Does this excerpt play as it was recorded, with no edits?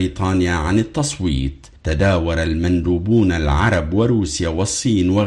no; 1 cut; at 1.8 s

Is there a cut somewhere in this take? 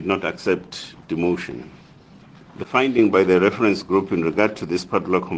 yes; 1 cut; at 2.4 s

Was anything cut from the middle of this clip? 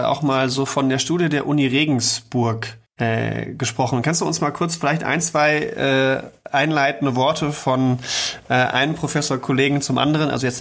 yes; 1 cut; at 2.9 s

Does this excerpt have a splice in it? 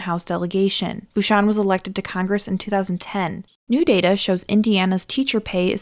yes; 2 cuts; at 1.1 s, 3.5 s

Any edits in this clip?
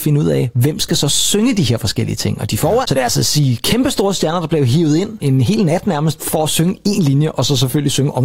yes; 2 cuts; at 2.8 s, 5.2 s

